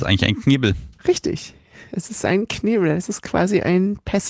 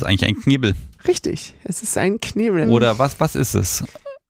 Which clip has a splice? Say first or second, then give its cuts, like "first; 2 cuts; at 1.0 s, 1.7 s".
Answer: second; 2 cuts; at 1.6 s, 2.6 s